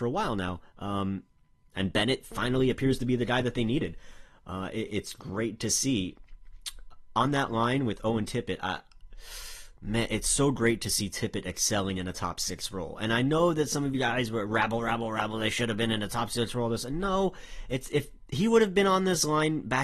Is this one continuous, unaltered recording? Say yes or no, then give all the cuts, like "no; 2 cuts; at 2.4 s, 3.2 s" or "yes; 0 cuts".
yes; 0 cuts